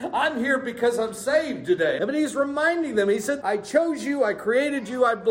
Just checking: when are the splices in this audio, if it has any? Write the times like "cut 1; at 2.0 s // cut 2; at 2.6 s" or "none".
cut 1; at 2.0 s // cut 2; at 3.4 s